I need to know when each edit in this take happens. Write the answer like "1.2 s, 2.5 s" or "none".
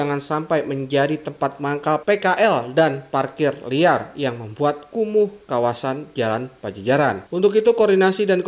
none